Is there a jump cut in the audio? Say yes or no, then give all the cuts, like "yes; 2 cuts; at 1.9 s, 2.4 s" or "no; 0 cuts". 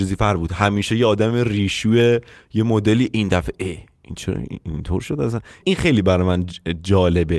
yes; 1 cut; at 5.6 s